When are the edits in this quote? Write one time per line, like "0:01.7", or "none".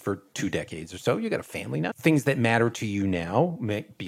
0:01.9